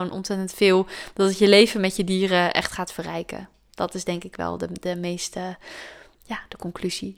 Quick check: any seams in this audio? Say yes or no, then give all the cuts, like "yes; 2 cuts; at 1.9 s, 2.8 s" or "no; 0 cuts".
no; 0 cuts